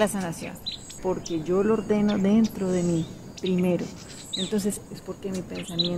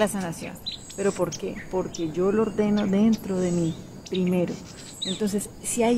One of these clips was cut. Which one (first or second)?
first